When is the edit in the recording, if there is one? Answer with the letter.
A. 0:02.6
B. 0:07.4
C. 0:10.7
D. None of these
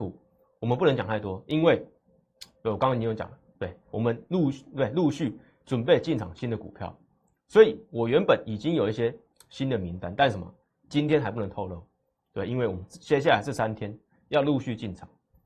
D